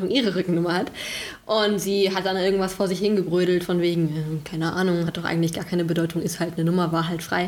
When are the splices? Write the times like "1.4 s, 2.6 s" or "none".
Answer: none